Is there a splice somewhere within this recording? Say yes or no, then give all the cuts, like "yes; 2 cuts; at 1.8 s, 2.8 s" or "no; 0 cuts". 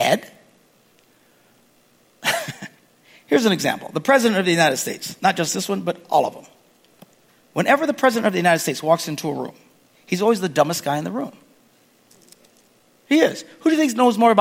no; 0 cuts